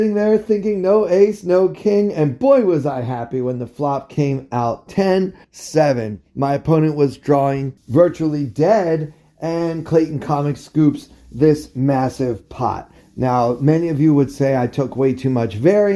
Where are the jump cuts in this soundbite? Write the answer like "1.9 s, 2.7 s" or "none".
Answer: 5.4 s